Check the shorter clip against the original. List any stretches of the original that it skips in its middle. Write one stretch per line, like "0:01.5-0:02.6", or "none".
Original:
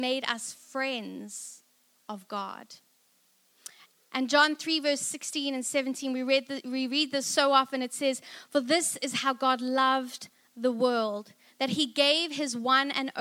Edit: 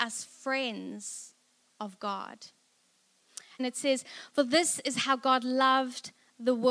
0:03.9-0:07.8